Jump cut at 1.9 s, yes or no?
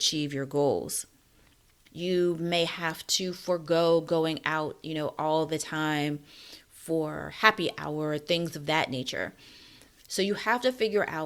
yes